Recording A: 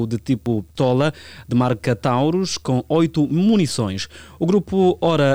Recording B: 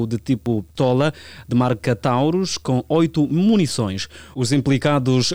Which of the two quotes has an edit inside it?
B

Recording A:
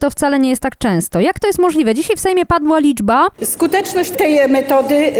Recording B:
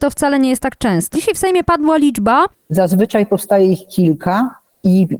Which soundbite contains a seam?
B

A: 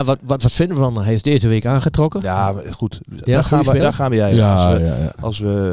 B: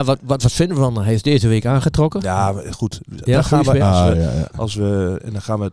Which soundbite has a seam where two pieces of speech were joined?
B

